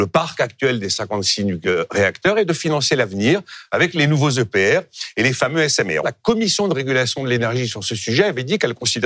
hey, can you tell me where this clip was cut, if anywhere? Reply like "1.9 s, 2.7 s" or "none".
6.0 s